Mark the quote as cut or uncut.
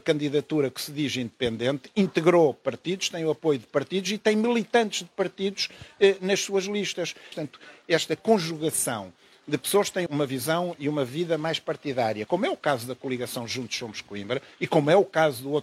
cut